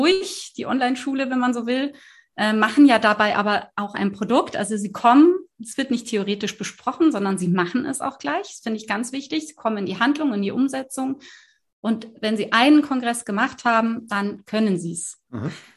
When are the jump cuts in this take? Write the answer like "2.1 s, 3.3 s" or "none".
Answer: none